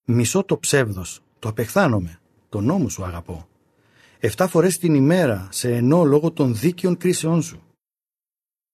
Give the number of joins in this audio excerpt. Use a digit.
0